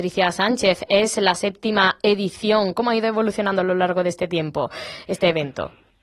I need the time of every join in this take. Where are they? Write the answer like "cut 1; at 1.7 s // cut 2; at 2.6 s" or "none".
none